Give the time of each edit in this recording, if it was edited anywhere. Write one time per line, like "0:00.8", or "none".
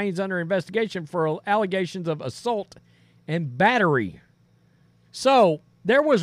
0:05.0